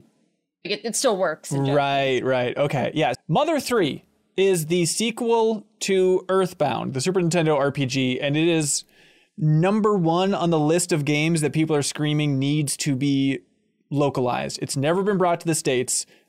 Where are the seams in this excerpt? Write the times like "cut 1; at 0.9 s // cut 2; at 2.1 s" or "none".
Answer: cut 1; at 3.1 s